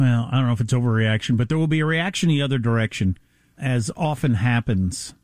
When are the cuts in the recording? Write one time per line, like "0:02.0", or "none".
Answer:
0:03.6